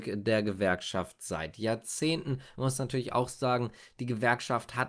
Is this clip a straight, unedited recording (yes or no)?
yes